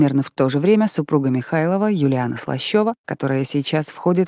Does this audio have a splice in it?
yes; 1 cut; at 3.0 s

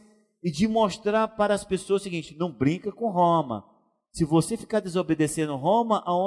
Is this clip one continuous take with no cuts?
yes; 0 cuts

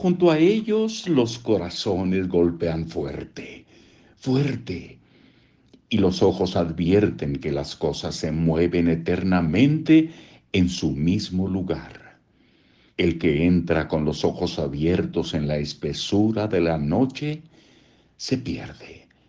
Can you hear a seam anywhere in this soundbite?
yes; 1 cut; at 12.9 s

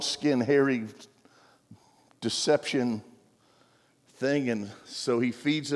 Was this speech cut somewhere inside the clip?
no; 0 cuts

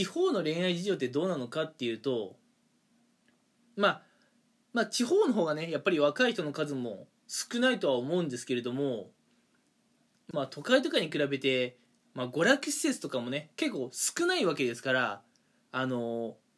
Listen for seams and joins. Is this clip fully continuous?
no; 2 cuts; at 10.3 s, 13.5 s

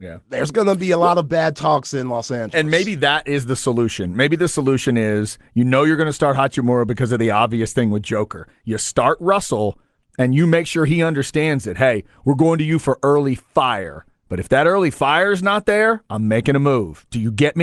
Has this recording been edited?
no; 0 cuts

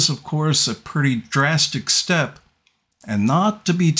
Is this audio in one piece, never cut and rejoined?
yes; 0 cuts

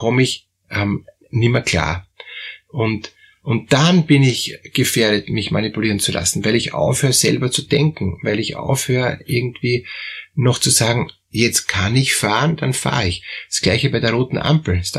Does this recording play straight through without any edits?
yes; 0 cuts

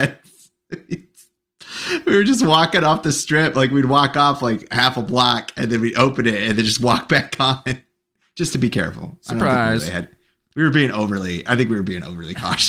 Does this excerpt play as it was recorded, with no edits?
yes; 0 cuts

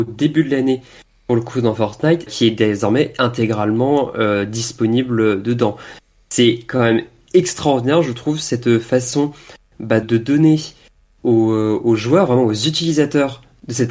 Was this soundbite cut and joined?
yes; 2 cuts; at 2.3 s, 10.0 s

